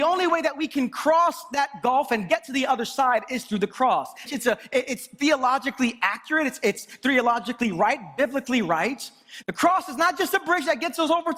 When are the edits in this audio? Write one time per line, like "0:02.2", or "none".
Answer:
0:04.3
0:09.4